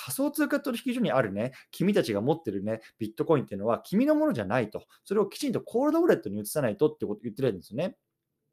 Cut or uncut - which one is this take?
uncut